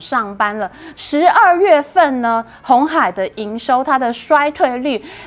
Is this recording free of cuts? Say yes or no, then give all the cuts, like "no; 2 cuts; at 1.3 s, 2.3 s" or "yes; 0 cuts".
no; 1 cut; at 0.9 s